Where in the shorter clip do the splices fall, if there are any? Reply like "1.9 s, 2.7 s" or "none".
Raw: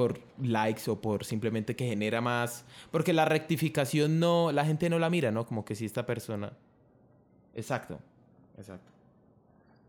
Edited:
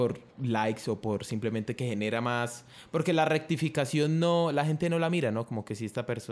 none